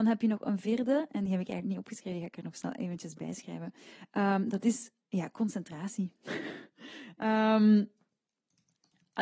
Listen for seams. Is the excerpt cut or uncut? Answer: uncut